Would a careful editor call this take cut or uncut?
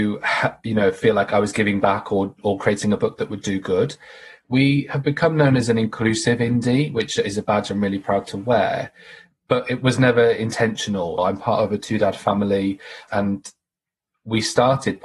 cut